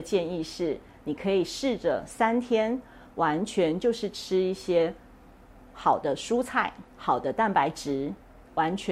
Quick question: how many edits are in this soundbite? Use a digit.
1